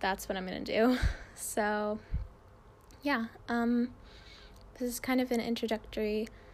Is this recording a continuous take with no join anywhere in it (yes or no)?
yes